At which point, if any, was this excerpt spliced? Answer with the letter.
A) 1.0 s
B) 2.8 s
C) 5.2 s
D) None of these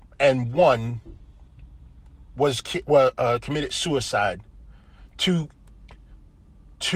D